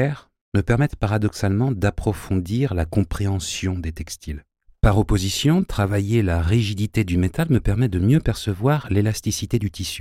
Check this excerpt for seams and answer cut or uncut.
uncut